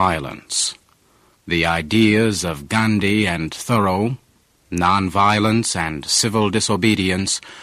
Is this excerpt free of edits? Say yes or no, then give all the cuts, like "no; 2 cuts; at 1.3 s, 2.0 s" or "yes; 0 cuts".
no; 1 cut; at 1.3 s